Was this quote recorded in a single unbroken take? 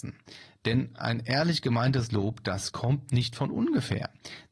yes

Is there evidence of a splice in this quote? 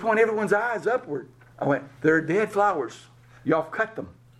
yes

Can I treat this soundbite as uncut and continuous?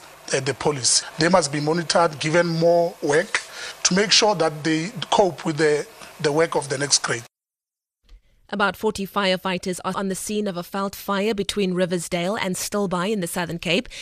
no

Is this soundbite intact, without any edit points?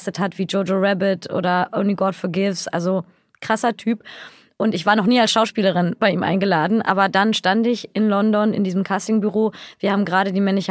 yes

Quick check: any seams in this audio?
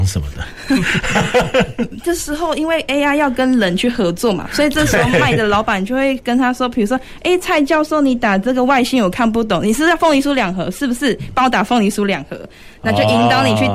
no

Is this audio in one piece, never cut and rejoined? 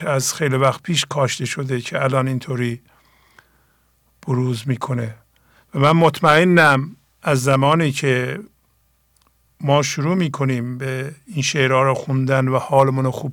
yes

